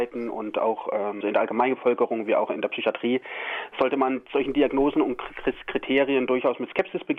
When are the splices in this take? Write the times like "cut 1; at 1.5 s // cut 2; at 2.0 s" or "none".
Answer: cut 1; at 1.2 s